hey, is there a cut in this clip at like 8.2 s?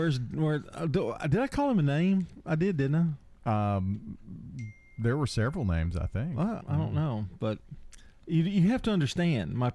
no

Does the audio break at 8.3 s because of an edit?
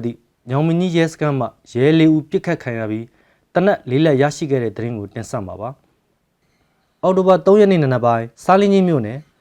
yes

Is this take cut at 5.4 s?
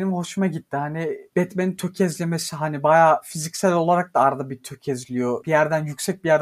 yes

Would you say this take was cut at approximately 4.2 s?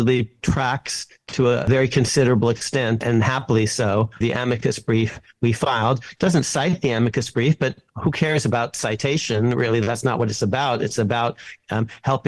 yes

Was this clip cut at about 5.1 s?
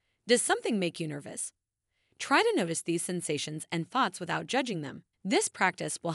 yes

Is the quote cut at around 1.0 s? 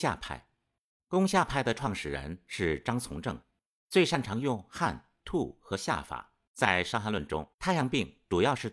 no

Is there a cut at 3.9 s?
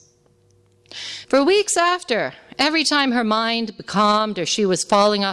no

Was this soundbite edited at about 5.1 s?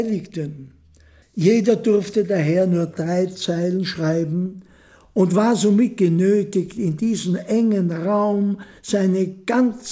no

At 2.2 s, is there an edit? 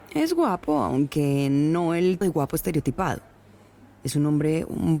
yes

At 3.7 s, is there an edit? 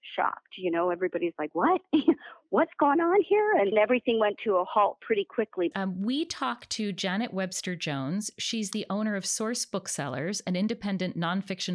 yes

